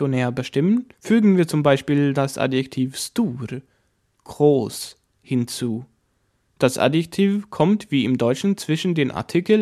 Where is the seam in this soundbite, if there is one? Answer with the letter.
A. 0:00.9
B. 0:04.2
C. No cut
A